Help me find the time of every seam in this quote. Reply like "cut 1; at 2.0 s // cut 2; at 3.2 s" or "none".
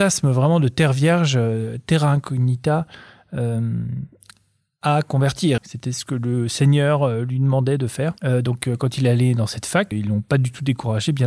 cut 1; at 5.6 s // cut 2; at 8.2 s // cut 3; at 9.9 s